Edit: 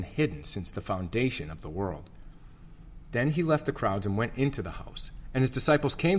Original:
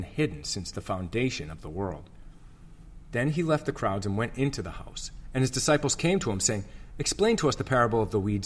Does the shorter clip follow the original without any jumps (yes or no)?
yes